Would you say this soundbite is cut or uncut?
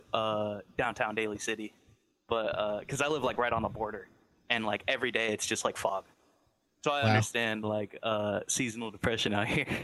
uncut